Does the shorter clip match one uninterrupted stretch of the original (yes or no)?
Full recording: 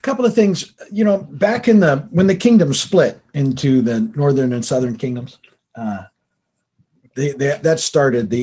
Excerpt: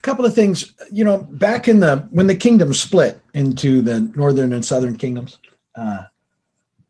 yes